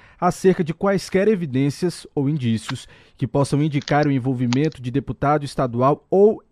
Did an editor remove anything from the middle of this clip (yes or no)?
no